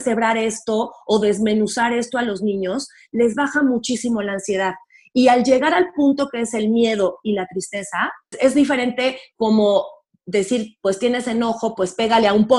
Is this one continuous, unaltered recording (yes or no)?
no